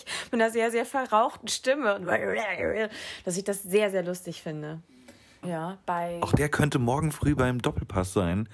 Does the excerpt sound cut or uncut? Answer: cut